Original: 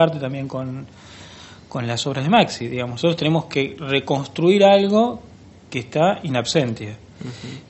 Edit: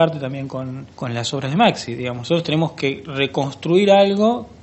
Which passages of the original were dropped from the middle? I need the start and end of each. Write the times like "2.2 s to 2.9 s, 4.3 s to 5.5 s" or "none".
0.9 s to 1.7 s

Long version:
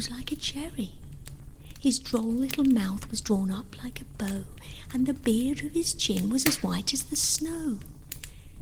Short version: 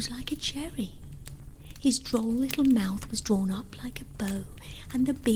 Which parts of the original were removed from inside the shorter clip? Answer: none

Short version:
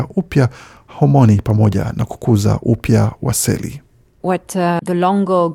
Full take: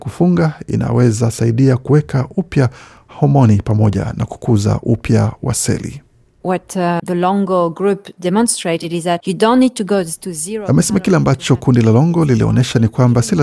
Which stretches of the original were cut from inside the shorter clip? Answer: none

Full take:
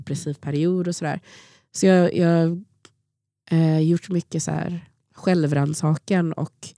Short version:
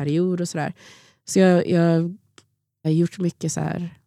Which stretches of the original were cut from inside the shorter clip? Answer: 3.3 s to 3.8 s

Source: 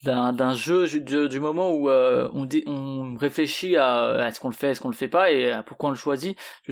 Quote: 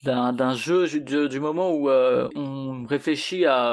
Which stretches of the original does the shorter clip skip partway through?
2.3 s to 2.6 s

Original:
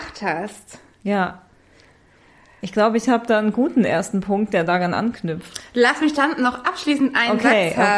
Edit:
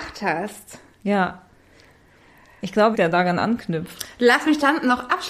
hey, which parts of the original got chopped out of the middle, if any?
2.9 s to 4.5 s

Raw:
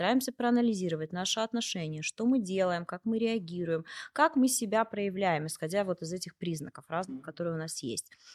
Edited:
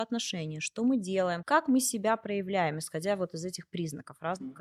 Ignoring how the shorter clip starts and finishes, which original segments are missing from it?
2.8 s to 4.1 s

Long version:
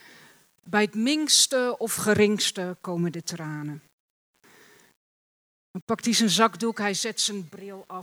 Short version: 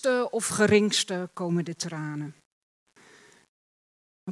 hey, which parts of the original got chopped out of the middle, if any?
none

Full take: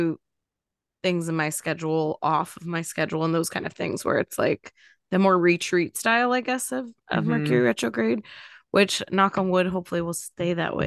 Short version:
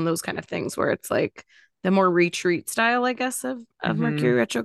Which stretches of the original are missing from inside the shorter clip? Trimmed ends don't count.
none

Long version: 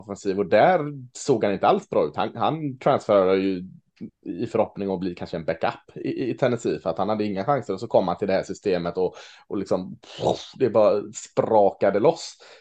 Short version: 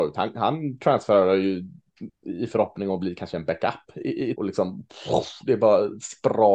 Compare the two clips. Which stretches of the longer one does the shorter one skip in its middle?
6.3 s to 9.5 s

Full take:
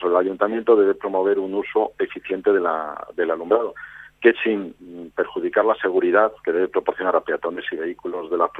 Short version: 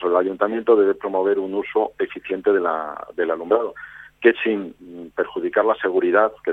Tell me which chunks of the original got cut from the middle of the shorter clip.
none

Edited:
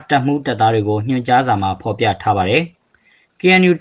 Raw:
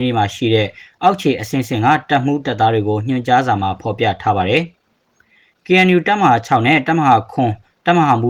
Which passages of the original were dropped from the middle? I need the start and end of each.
4.8 s to 5.0 s

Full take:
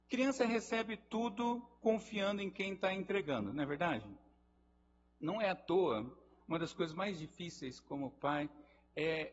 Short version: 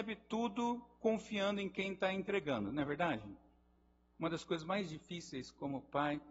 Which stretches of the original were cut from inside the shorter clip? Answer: 4.9 s to 6.4 s

